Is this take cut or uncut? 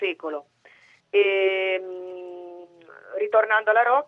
cut